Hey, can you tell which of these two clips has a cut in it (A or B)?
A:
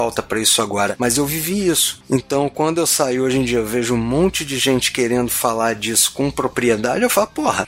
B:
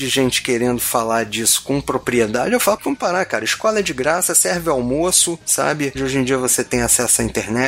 B